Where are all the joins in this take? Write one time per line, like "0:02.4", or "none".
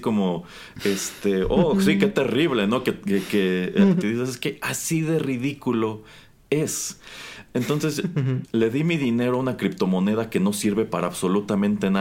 0:04.0
0:08.4